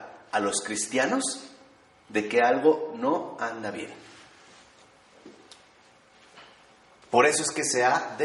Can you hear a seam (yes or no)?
yes